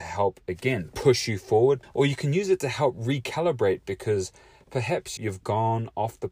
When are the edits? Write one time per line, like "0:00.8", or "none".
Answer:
0:01.8
0:05.2